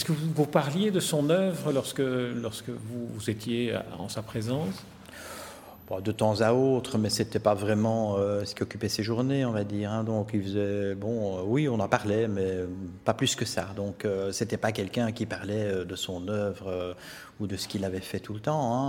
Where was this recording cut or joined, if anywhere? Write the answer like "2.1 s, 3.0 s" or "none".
none